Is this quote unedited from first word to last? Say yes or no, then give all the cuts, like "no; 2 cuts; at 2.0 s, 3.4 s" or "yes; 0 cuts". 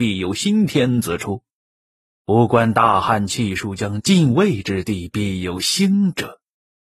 yes; 0 cuts